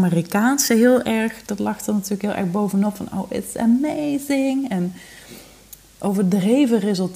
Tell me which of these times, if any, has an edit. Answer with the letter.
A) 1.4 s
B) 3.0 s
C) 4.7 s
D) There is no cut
D